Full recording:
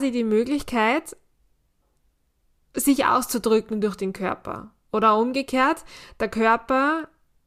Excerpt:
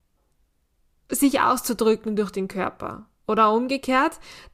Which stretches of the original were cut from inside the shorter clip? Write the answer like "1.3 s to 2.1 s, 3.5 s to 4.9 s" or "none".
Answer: none